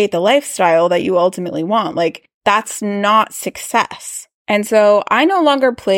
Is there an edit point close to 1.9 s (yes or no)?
no